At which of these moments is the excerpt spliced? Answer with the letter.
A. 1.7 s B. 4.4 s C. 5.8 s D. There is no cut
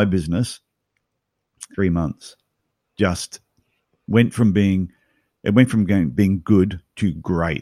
A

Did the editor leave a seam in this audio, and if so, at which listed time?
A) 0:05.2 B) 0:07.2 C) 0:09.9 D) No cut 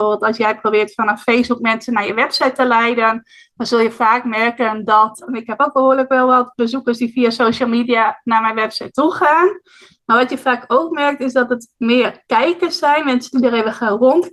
A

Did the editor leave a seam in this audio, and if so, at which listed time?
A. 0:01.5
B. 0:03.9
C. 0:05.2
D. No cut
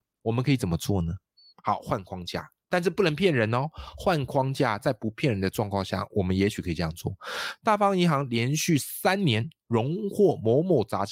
D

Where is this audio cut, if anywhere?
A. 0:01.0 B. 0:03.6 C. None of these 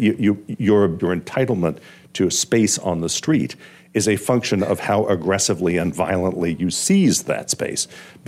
A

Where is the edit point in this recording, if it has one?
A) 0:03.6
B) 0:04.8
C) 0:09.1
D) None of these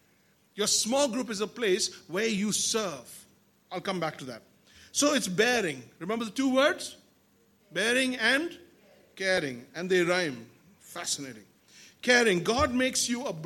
D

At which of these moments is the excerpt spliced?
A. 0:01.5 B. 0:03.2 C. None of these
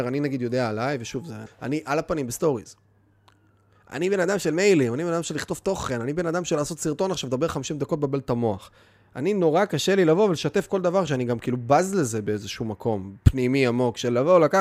A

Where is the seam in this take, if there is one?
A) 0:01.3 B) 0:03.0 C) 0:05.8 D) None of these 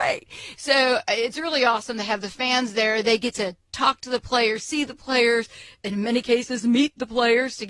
D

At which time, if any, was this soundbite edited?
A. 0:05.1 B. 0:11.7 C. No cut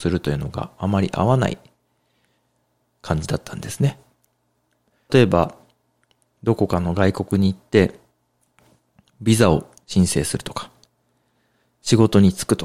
A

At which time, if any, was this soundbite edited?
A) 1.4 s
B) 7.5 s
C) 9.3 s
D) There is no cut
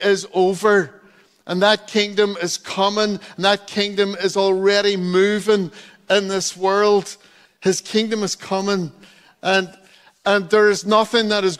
B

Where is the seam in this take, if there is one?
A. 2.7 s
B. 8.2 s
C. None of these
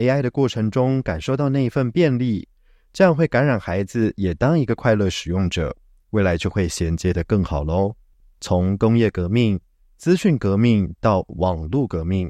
B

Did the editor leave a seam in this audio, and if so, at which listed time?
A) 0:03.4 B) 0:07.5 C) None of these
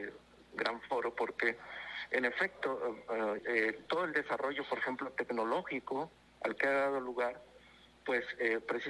A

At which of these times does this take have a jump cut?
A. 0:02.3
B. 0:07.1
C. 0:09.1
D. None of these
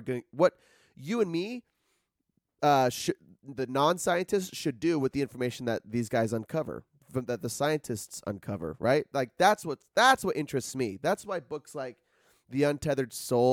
D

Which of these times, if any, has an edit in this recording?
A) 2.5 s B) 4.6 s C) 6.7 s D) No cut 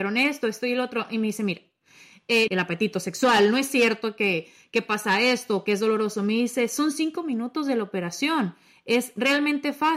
A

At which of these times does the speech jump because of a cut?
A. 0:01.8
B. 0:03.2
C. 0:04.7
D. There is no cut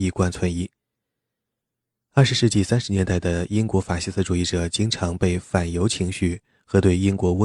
D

